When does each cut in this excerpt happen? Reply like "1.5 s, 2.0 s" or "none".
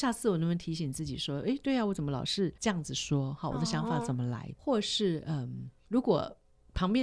none